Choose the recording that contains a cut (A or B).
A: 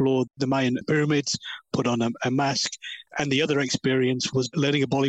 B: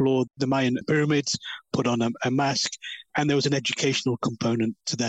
A